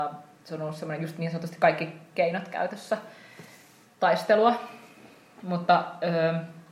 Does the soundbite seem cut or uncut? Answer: uncut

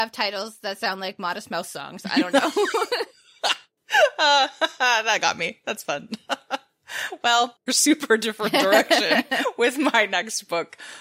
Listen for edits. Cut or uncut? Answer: cut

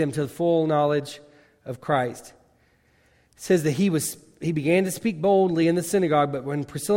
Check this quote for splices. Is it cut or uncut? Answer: uncut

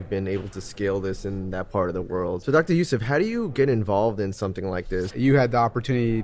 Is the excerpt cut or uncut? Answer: cut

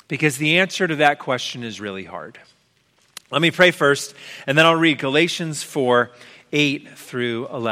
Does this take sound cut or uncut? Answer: uncut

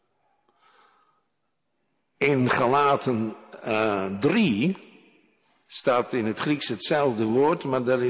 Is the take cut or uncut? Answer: uncut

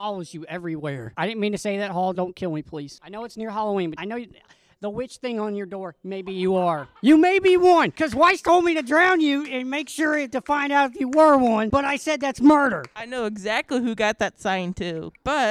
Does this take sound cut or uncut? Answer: uncut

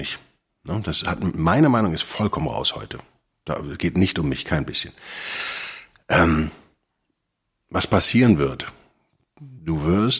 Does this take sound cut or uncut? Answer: uncut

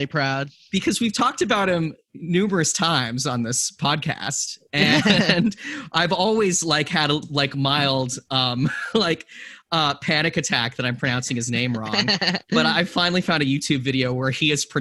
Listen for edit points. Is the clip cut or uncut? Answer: uncut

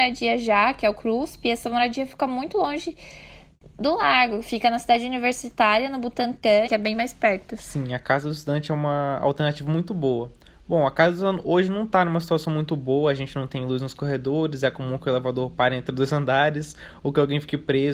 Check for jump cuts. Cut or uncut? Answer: cut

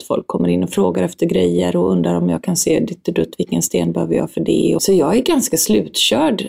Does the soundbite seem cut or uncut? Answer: cut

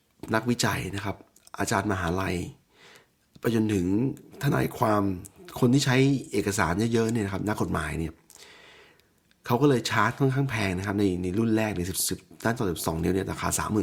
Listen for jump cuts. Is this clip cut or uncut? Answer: uncut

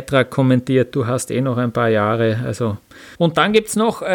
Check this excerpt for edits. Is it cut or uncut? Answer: cut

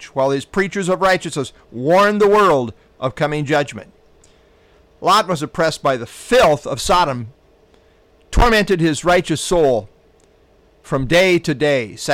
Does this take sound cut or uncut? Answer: uncut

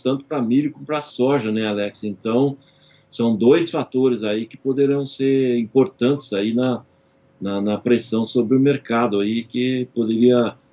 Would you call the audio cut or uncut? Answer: uncut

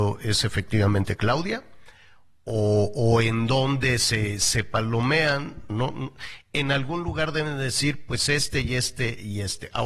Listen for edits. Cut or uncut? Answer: cut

